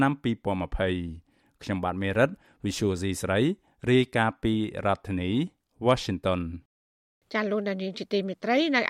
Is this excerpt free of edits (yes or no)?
yes